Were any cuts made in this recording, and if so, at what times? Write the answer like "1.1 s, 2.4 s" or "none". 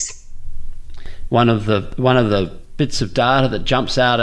1.3 s